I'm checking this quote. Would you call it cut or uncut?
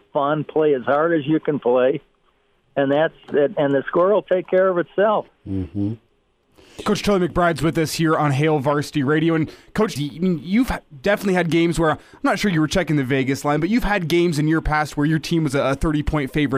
cut